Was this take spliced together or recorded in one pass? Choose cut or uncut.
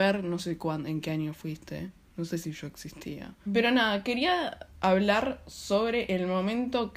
cut